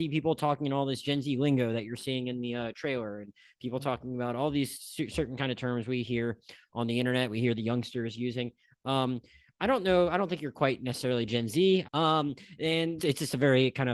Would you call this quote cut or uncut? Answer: cut